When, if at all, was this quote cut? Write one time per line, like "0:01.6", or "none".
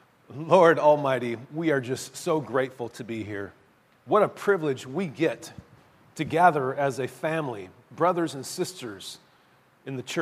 none

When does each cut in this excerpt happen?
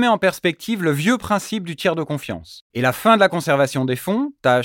0:02.7

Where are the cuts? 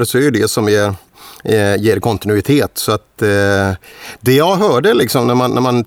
none

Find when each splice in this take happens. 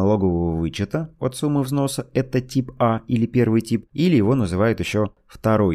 0:03.9

